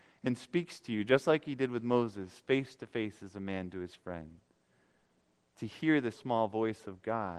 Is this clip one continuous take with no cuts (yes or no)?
no